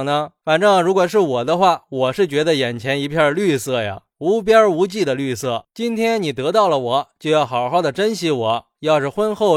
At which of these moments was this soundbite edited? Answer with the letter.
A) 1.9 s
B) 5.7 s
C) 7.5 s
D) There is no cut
B